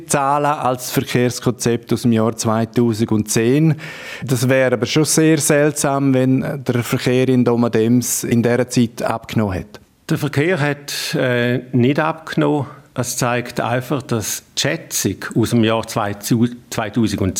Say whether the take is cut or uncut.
uncut